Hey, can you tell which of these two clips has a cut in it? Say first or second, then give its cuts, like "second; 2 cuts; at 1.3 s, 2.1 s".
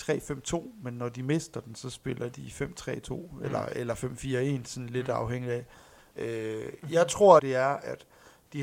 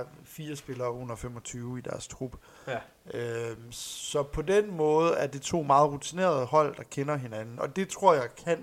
first; 2 cuts; at 6.1 s, 7.4 s